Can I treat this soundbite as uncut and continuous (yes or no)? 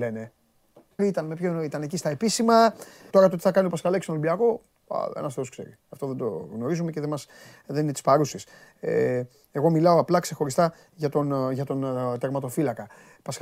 no